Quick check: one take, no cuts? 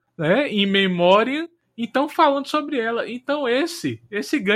yes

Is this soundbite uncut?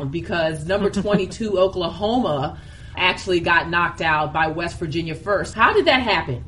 no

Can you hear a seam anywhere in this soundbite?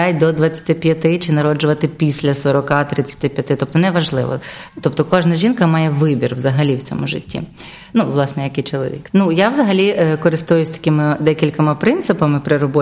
yes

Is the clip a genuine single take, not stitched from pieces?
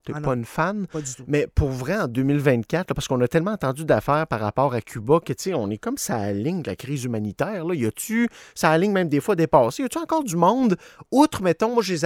yes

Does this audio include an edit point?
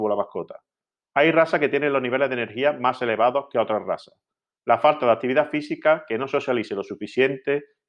no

